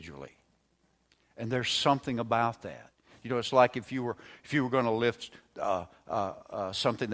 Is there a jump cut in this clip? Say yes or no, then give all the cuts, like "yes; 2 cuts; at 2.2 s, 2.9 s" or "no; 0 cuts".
no; 0 cuts